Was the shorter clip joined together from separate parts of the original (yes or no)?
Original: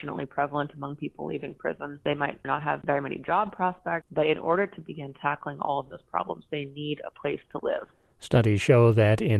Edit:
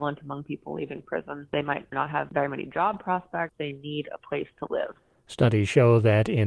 yes